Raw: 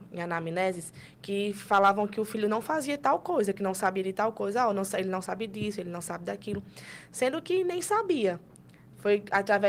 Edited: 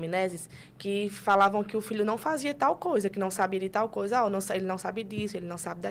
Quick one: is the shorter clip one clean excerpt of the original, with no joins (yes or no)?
yes